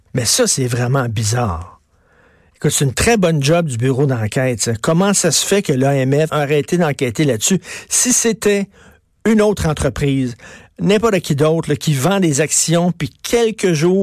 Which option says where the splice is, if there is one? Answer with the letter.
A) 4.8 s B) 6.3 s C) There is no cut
B